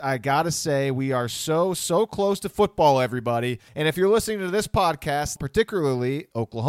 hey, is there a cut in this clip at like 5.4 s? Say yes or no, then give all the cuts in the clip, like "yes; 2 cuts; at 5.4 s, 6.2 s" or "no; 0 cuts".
yes; 2 cuts; at 3.7 s, 5.4 s